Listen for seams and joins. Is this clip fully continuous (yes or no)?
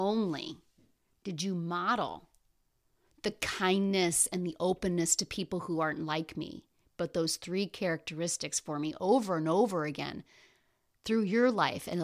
yes